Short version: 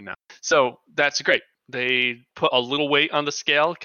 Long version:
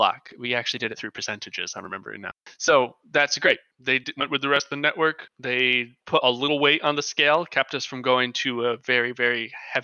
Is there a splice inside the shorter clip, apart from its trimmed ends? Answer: yes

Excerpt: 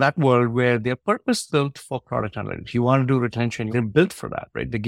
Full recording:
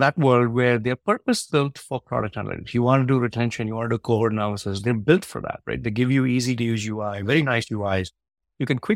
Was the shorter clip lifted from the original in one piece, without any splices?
no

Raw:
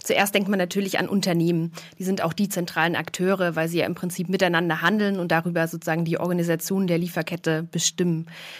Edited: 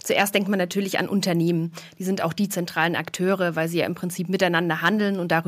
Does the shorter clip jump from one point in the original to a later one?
no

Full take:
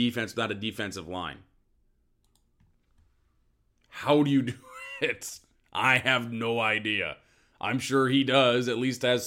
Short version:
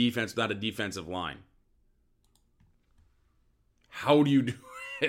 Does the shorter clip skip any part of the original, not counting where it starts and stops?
no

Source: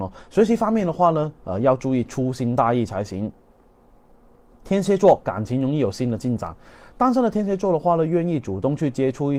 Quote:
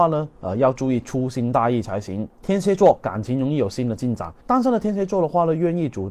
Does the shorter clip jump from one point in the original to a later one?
yes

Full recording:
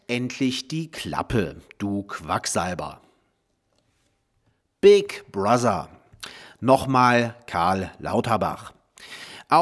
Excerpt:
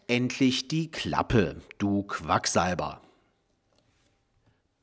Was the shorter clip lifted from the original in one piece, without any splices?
yes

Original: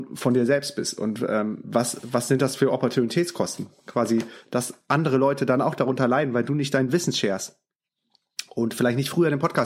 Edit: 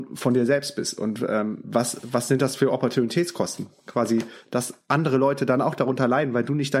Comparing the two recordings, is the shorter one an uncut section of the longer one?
yes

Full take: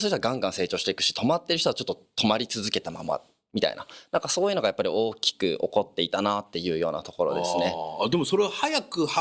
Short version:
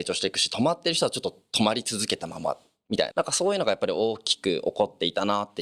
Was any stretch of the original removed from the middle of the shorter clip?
yes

